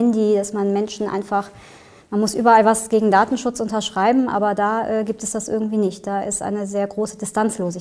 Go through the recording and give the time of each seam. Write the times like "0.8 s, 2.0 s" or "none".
none